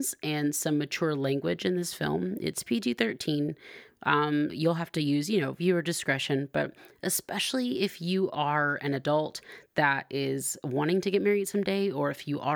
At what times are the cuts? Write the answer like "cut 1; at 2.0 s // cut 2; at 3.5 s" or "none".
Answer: cut 1; at 4.5 s